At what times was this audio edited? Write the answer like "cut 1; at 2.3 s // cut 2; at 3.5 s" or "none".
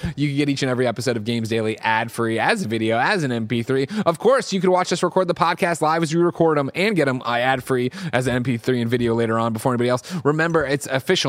none